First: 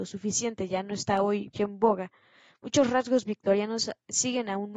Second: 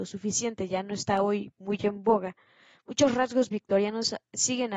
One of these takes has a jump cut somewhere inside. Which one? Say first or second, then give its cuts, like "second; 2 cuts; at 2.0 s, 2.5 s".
first; 1 cut; at 1.5 s